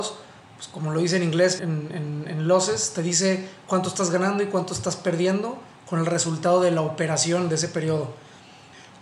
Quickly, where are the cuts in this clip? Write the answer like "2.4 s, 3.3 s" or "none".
1.6 s